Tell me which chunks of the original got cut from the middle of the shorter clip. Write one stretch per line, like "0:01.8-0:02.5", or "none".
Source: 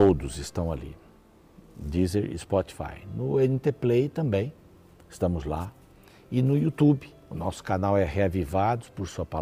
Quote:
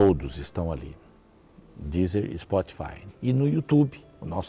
0:03.1-0:06.2

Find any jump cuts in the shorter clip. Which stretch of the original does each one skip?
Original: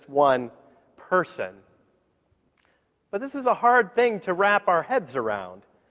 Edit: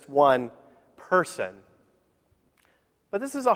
none

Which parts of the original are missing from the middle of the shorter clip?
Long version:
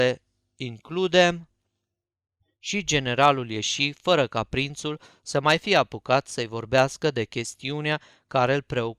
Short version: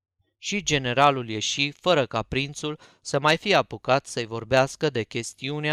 none

